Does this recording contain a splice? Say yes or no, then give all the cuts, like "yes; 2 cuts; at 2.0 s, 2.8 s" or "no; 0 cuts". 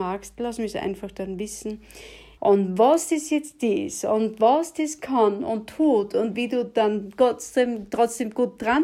yes; 1 cut; at 2.4 s